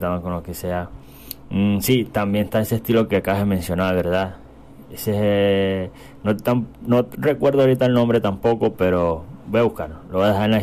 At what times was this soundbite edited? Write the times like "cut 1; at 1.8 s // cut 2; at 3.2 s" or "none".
none